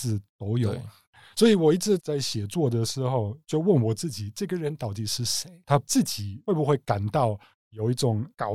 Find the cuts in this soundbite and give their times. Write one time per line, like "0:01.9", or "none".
none

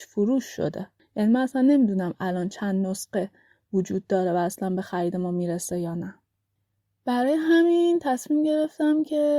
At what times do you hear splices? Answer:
none

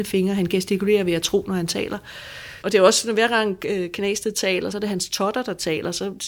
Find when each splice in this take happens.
0:02.6
0:04.7

